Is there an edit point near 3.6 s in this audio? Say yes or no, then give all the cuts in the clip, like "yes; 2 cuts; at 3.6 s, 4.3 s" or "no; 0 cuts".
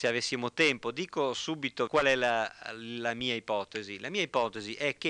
no; 1 cut; at 1.9 s